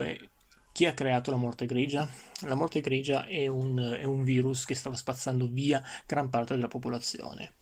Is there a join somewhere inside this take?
no; 0 cuts

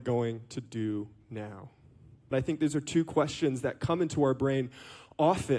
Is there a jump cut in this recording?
yes; 1 cut; at 2.3 s

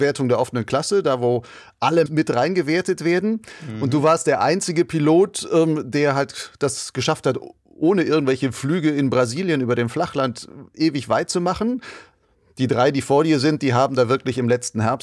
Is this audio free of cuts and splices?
no; 1 cut; at 2.1 s

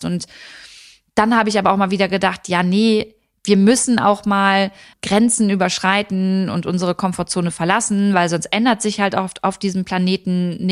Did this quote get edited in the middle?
yes; 1 cut; at 4.9 s

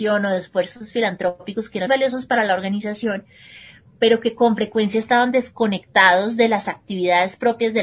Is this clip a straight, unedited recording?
no; 1 cut; at 1.9 s

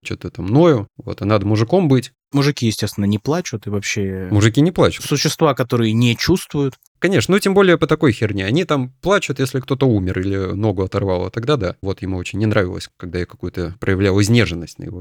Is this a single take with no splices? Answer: no; 1 cut; at 11.8 s

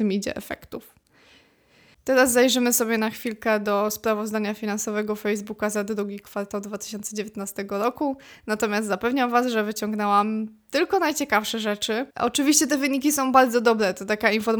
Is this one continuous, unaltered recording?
no; 2 cuts; at 1.9 s, 12.1 s

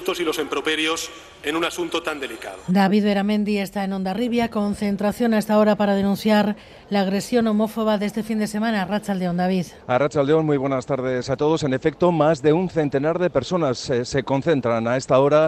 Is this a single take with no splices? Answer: no; 1 cut; at 9.8 s

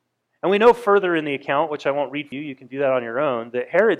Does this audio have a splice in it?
yes; 1 cut; at 2.3 s

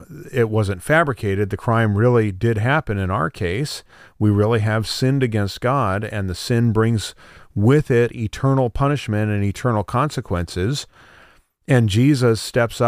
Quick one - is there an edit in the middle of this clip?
no; 0 cuts

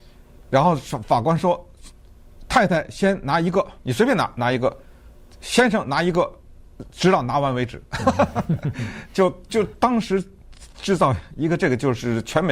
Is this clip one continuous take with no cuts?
no; 1 cut; at 3.8 s

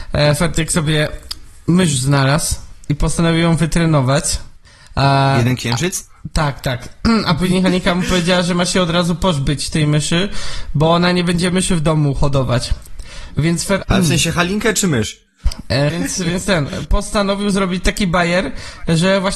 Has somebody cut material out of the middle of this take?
yes; 2 cuts; at 13.8 s, 15.9 s

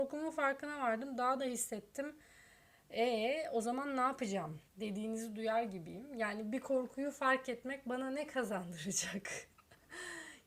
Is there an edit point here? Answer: yes; 1 cut; at 4.7 s

